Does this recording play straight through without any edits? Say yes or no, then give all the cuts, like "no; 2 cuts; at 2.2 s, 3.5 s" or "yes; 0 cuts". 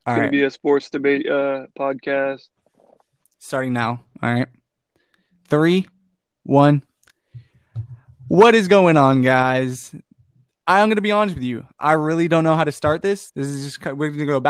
no; 2 cuts; at 6.4 s, 13.3 s